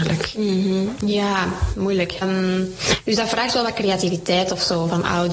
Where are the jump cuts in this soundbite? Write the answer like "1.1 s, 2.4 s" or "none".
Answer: 2.2 s

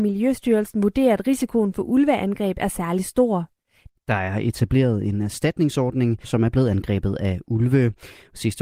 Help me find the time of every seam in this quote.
3.9 s, 6.2 s

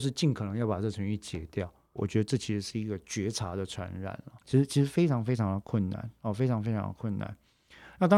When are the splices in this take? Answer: 2.0 s, 4.4 s

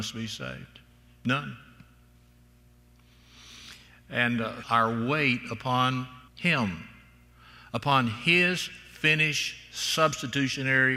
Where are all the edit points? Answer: 4.6 s, 6.3 s

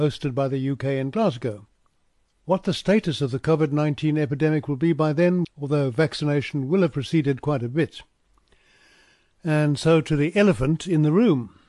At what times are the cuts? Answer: 5.4 s

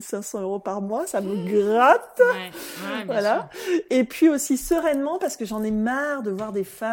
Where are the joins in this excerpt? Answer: none

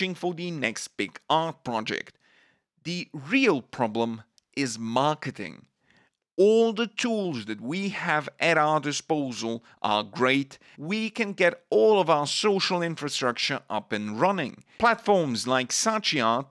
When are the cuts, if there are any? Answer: 10.7 s, 14.8 s

